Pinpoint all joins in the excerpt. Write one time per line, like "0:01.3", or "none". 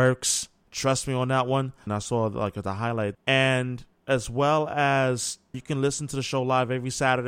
0:01.9
0:03.1
0:05.5